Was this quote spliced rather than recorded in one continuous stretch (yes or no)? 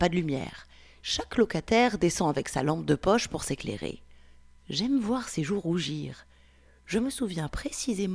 yes